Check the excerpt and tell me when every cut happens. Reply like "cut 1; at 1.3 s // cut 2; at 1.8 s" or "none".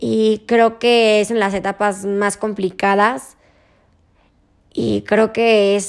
none